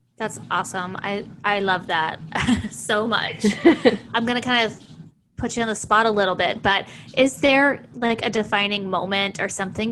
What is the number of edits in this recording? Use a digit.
1